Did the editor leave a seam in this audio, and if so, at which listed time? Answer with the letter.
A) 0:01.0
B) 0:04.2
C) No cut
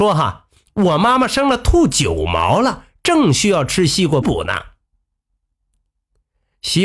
B